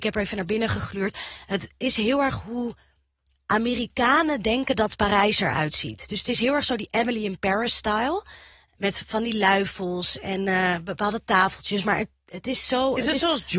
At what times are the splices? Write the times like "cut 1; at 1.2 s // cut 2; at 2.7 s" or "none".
none